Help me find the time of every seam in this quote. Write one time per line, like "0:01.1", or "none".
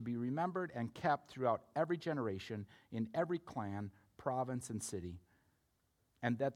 none